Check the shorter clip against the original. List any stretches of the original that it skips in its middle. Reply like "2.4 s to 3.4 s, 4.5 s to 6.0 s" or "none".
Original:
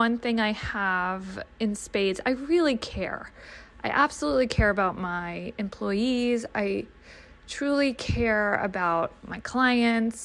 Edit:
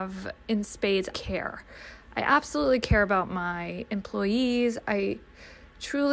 2.2 s to 2.8 s